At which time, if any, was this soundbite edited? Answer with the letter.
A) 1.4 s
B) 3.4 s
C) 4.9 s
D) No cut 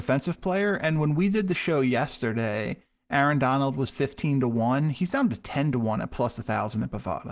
D